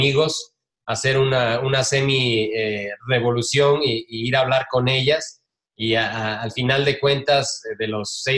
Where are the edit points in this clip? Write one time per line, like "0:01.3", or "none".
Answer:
none